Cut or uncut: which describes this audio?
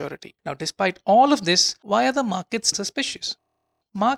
cut